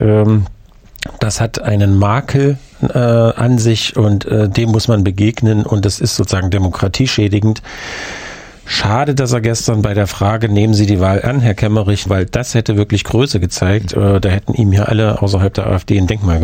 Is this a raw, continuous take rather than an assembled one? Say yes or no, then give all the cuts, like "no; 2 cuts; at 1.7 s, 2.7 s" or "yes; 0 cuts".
no; 1 cut; at 12.1 s